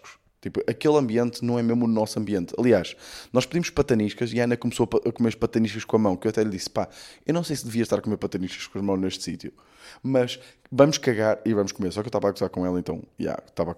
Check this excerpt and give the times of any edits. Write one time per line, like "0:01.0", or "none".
none